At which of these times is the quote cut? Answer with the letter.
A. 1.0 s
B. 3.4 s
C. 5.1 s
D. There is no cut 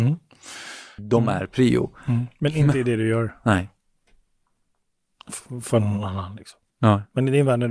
A